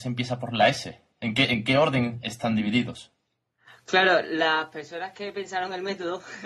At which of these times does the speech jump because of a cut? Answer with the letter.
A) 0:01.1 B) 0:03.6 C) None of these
C